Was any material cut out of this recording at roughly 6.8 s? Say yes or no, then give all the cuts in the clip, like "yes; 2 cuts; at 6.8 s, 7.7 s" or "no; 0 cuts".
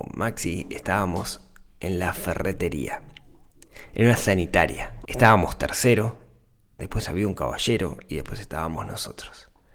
yes; 2 cuts; at 5.0 s, 6.8 s